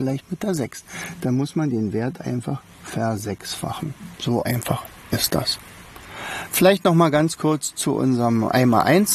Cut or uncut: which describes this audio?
uncut